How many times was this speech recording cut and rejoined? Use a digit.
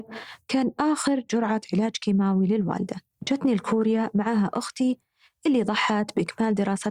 1